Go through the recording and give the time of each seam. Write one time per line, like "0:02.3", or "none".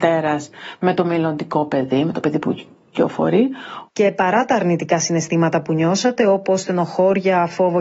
0:03.9